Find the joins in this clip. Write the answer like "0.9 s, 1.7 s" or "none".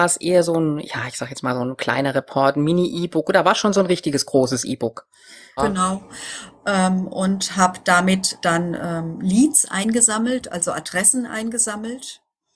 5.6 s